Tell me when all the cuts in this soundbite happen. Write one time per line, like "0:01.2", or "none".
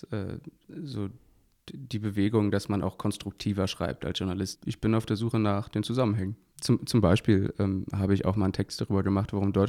0:04.5